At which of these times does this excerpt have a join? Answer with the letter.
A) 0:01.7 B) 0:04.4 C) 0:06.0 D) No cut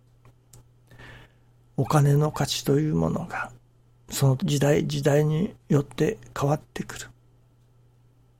B